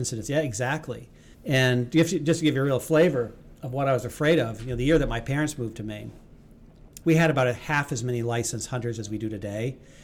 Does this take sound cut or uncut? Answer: cut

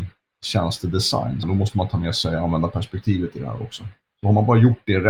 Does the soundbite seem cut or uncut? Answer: cut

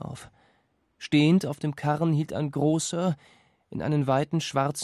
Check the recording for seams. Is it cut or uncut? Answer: uncut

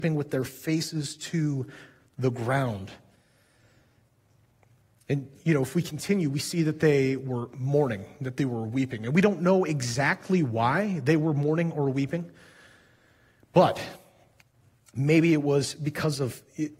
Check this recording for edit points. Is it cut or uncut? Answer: uncut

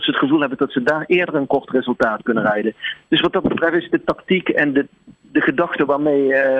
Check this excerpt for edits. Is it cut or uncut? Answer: uncut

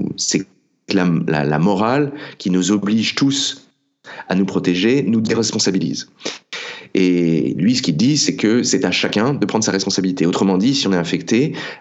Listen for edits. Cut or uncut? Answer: uncut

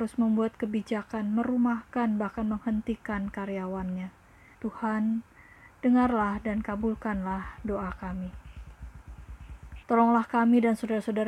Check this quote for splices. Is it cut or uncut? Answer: cut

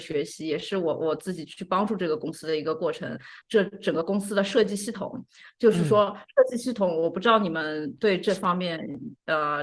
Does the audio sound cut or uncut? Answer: cut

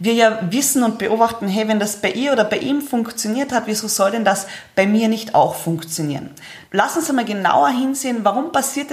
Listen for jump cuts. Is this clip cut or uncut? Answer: cut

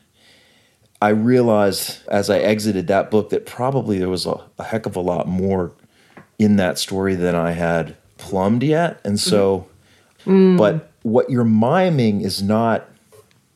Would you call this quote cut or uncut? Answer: cut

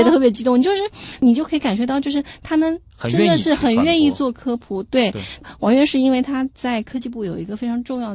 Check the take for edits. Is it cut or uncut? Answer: uncut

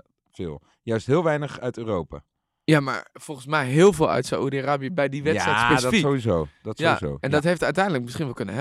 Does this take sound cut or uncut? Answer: uncut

